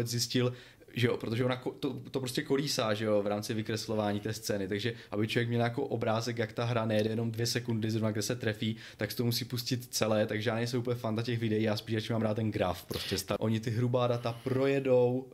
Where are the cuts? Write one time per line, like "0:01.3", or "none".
0:13.4